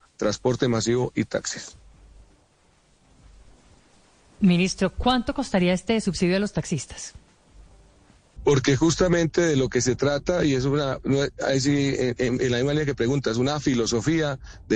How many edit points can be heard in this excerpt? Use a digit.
1